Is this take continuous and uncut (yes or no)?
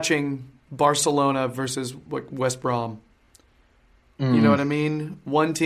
yes